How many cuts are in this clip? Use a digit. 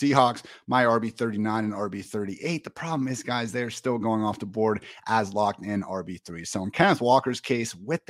0